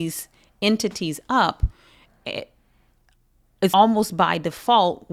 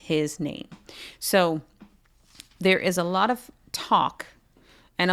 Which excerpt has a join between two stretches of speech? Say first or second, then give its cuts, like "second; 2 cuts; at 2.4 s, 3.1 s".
first; 1 cut; at 3.7 s